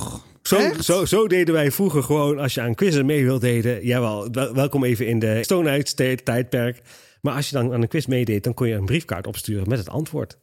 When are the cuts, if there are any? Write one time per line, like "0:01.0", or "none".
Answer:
0:05.4